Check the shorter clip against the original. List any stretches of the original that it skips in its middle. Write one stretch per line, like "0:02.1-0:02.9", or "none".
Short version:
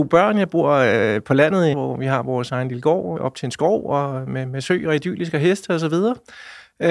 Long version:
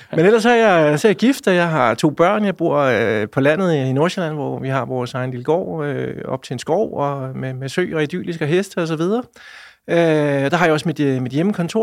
0:03.8-0:04.3
0:05.8-0:06.2

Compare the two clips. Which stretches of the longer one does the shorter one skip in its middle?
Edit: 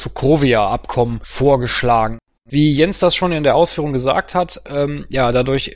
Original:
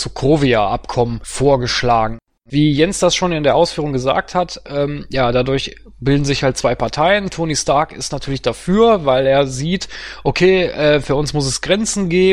none

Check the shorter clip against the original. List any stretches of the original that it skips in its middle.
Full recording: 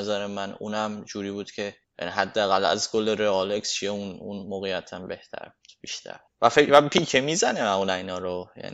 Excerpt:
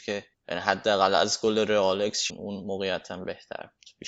0:03.8-0:04.1

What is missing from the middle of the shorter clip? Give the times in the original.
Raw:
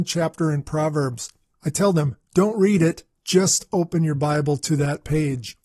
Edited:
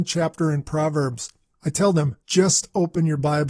0:02.2-0:03.2

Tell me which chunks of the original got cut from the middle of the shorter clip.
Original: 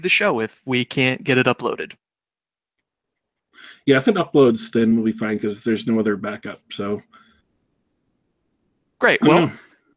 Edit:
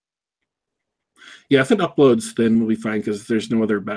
none

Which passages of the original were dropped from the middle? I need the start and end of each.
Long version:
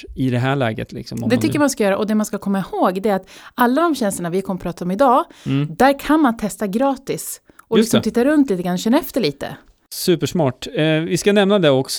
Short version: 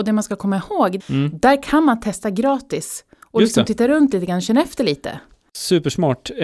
0:03.0-0:05.4

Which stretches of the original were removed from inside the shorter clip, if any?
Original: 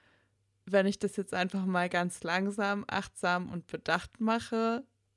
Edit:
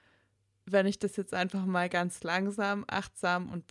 none

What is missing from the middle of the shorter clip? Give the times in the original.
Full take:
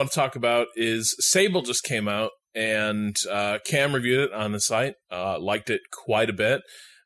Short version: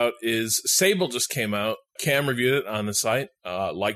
0:02.5-0:03.6

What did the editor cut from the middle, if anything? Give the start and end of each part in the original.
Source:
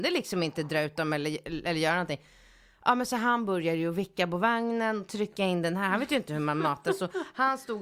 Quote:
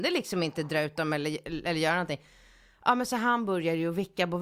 none

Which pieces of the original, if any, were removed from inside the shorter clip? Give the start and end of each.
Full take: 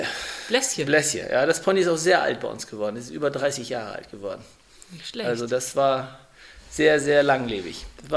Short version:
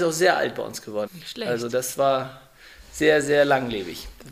0:02.9-0:04.8

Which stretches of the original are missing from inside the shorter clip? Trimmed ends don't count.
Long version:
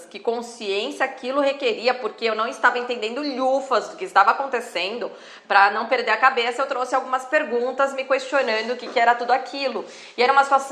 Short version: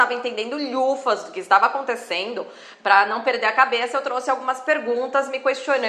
none

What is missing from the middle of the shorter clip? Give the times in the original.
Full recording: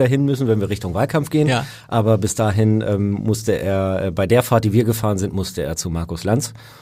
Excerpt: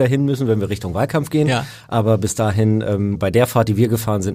0:03.1-0:04.1

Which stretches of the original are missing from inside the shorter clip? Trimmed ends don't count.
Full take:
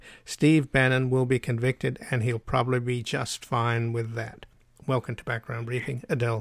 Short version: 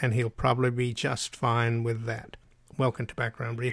none

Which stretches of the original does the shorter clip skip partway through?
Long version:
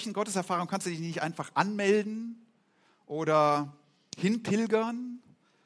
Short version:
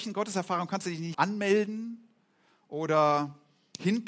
0:01.1-0:01.5

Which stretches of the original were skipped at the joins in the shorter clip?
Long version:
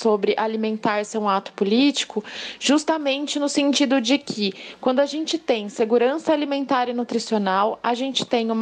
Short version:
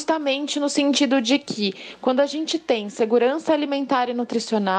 none

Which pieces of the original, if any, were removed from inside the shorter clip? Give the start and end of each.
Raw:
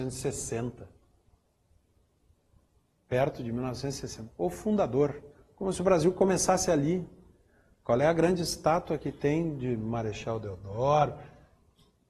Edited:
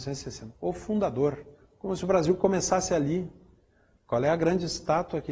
none

